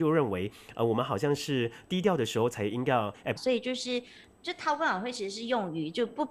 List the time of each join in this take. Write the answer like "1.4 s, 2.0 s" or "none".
3.4 s